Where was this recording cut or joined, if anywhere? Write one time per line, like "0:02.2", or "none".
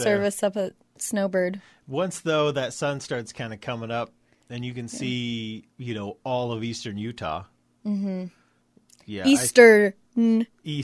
0:05.7